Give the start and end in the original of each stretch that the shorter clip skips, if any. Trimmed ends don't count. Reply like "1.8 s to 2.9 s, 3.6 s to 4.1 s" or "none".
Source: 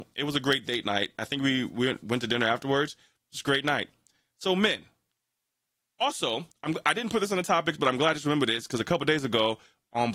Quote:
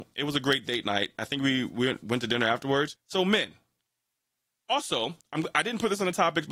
2.9 s to 4.3 s